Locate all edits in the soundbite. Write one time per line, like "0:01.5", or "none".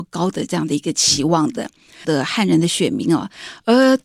0:02.0